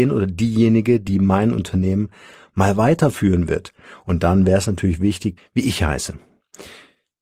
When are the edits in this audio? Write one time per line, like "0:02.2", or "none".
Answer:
0:05.4